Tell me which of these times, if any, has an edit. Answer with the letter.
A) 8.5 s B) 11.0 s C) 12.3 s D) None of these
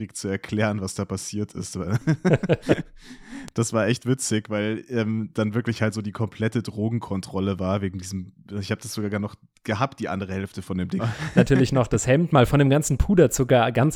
B